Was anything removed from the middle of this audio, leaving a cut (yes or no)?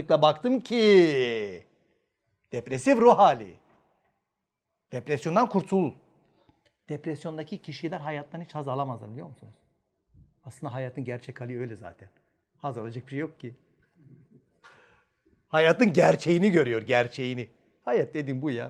no